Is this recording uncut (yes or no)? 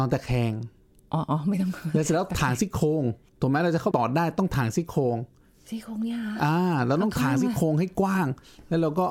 no